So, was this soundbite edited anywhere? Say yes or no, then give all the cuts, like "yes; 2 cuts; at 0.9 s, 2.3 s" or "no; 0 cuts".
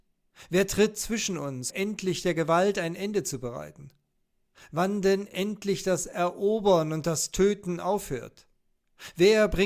yes; 2 cuts; at 1.7 s, 4.5 s